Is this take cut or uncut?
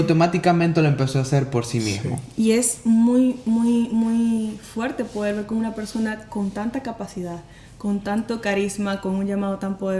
uncut